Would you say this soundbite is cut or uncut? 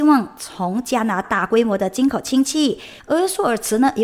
cut